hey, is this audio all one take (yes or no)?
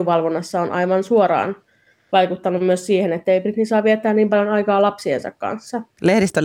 yes